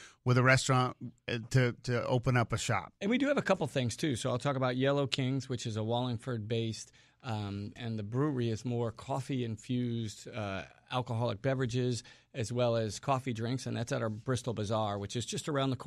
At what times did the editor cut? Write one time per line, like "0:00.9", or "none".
0:07.8

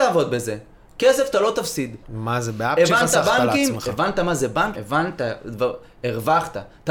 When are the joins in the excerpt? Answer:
0:02.0
0:04.8

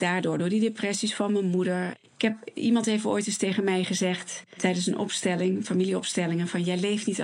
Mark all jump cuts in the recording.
none

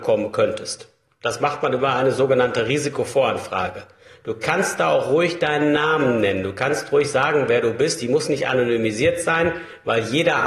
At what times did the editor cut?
none

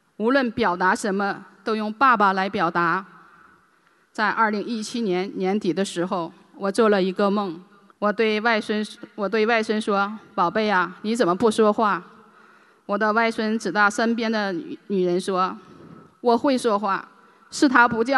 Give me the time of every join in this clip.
0:07.9

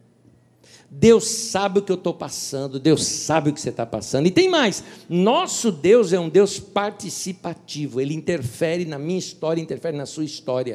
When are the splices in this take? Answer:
none

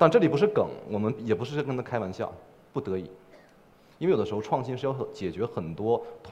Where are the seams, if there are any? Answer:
0:02.7

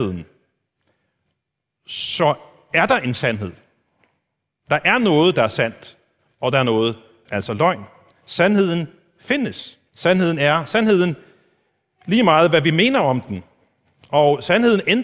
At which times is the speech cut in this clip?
0:07.3
0:09.9

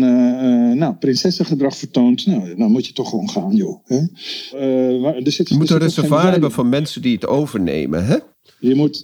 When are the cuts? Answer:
0:04.5

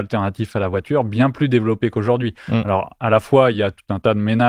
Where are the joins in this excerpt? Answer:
none

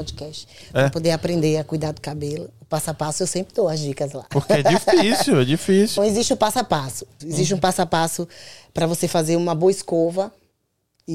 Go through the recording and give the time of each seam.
0:06.0
0:07.2

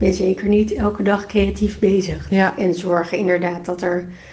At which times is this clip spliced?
0:02.3

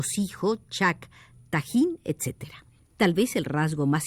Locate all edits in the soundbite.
0:02.8

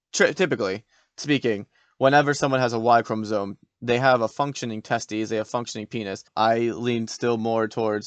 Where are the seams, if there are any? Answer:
0:06.3

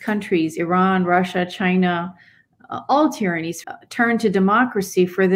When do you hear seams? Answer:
0:03.6

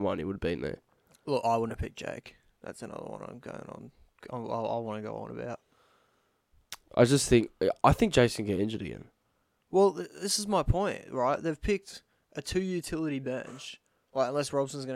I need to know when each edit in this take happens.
none

